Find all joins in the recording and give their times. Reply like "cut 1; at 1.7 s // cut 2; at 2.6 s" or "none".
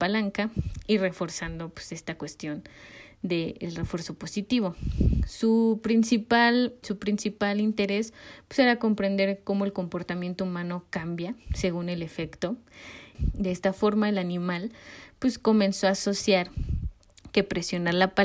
cut 1; at 6.8 s // cut 2; at 13.1 s